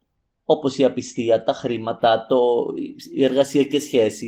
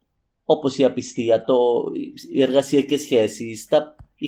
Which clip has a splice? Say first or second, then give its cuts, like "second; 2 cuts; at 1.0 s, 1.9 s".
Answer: second; 1 cut; at 1.4 s